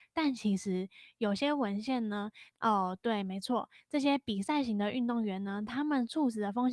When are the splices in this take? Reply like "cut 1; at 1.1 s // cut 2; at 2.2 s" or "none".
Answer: cut 1; at 2.5 s